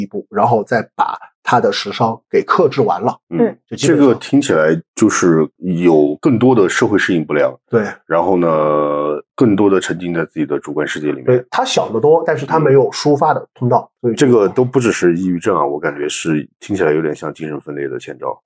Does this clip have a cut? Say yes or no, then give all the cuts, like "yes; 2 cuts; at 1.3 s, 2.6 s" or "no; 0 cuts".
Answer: no; 0 cuts